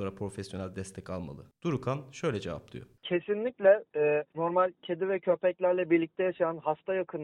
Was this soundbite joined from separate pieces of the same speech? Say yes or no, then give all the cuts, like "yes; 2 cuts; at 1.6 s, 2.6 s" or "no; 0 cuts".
no; 0 cuts